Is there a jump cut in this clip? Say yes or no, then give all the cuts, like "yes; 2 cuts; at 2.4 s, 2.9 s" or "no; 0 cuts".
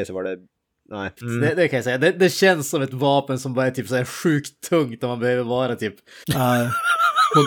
yes; 2 cuts; at 1.2 s, 6.2 s